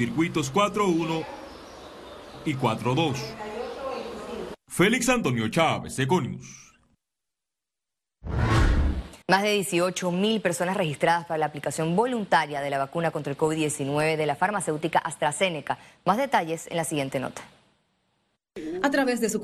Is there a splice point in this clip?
yes; 1 cut; at 9.2 s

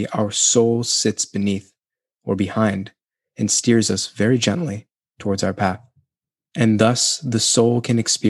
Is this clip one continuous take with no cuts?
no; 1 cut; at 6.4 s

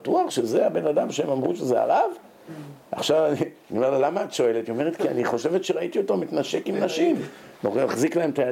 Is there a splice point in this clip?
no; 0 cuts

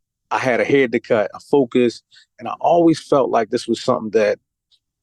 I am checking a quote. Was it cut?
yes; 1 cut; at 1.3 s

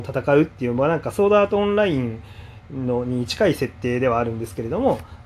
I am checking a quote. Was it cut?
no; 0 cuts

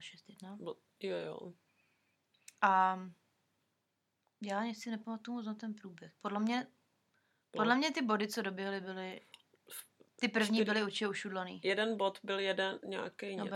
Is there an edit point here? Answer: no; 0 cuts

